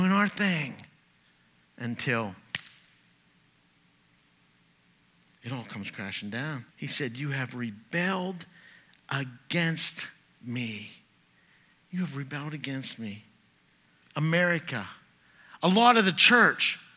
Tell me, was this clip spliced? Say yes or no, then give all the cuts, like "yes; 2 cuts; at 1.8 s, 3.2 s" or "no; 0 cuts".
yes; 2 cuts; at 6.7 s, 14.0 s